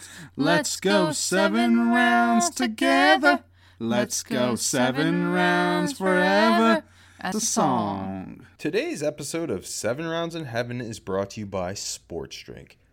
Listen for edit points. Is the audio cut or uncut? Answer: cut